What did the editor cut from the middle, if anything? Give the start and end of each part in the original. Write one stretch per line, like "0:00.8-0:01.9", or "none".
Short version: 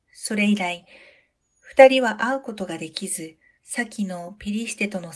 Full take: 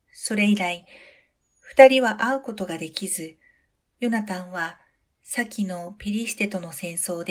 0:03.6-0:05.2